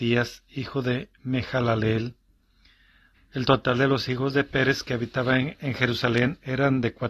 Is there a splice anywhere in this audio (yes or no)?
yes